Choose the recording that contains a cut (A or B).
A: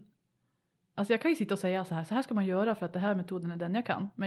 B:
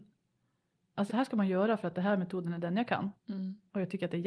B